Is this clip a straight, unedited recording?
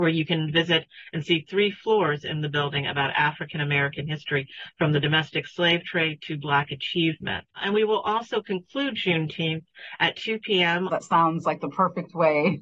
no; 1 cut; at 10.9 s

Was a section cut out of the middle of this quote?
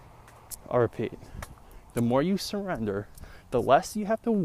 no; 0 cuts

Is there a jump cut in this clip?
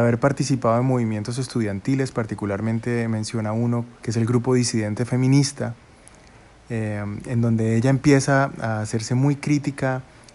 yes; 1 cut; at 4.0 s

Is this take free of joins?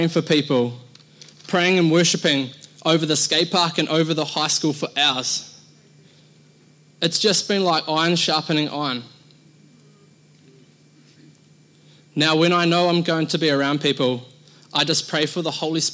yes; 0 cuts

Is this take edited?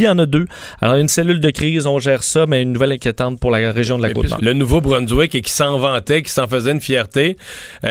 yes; 1 cut; at 4.4 s

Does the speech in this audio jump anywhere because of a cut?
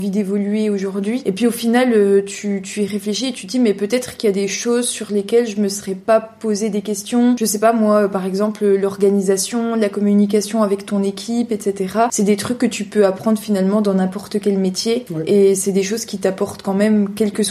no; 0 cuts

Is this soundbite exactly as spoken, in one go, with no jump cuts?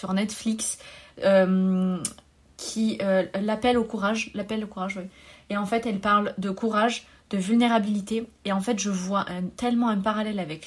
yes; 0 cuts

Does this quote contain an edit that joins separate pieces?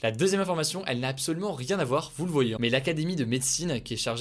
yes; 1 cut; at 2.6 s

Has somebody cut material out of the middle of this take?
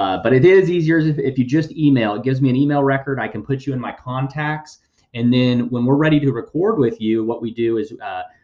no; 0 cuts

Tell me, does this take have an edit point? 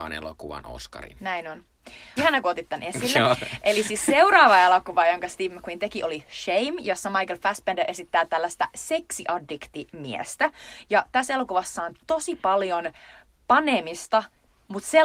yes; 1 cut; at 2.2 s

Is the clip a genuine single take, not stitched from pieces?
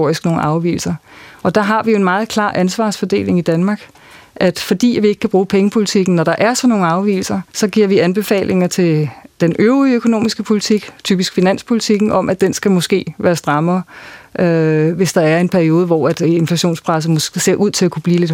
no; 1 cut; at 7.5 s

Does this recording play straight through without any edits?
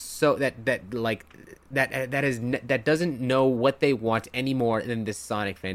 yes; 0 cuts

